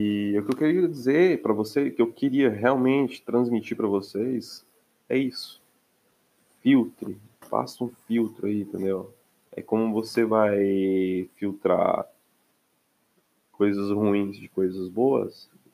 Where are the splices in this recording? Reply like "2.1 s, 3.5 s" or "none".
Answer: 7.4 s